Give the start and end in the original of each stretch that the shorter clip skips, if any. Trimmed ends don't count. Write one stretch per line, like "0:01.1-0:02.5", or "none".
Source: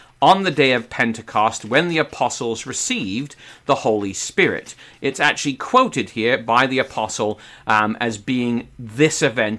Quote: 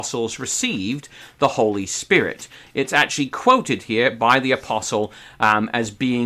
none